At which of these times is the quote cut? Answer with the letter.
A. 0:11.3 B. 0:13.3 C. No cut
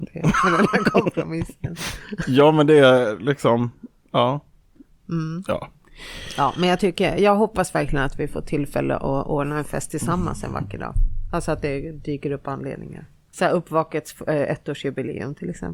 B